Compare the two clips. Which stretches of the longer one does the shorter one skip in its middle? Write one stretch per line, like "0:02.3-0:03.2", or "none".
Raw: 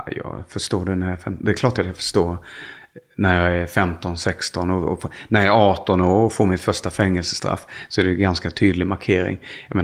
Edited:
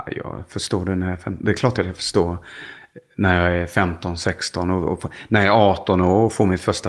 none